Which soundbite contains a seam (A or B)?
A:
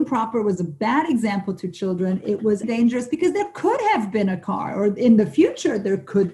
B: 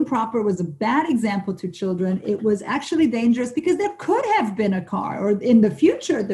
A